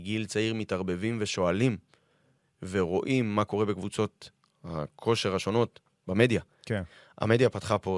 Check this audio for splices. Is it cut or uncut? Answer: uncut